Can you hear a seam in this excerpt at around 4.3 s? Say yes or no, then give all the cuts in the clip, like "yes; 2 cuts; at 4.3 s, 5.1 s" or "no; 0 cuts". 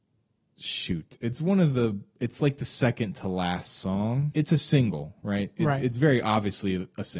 yes; 1 cut; at 4.3 s